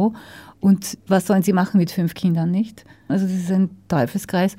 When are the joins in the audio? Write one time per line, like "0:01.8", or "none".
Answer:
0:01.0
0:03.1